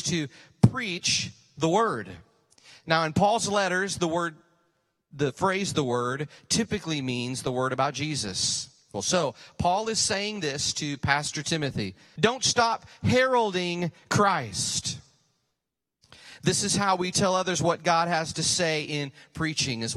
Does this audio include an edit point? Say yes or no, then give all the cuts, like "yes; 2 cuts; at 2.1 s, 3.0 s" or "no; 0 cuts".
yes; 2 cuts; at 8.9 s, 12.2 s